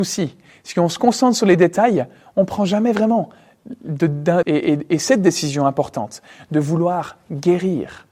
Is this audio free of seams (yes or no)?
no